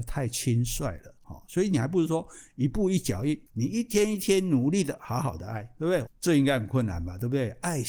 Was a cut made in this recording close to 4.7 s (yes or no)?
no